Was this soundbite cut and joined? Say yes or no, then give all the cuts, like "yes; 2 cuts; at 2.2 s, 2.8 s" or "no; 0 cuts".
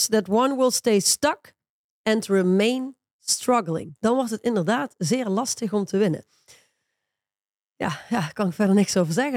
yes; 1 cut; at 4.0 s